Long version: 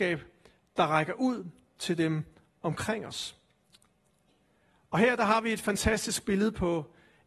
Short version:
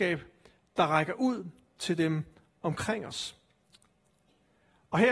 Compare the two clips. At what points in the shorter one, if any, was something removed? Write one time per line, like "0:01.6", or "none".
none